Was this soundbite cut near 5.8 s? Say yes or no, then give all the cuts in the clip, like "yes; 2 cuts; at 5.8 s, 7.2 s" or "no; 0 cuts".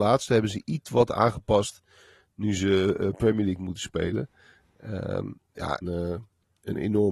yes; 1 cut; at 5.8 s